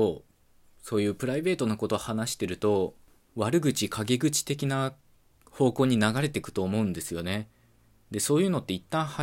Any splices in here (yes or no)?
no